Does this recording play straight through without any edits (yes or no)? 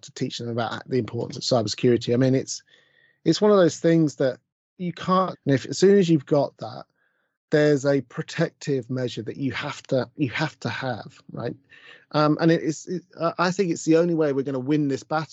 no